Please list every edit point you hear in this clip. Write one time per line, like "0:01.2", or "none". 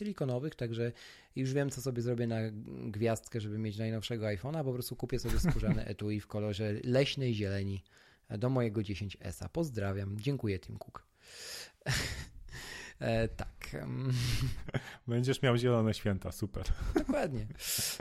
none